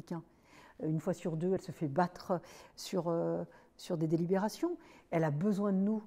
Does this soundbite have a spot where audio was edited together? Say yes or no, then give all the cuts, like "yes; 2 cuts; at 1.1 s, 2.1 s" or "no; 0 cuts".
no; 0 cuts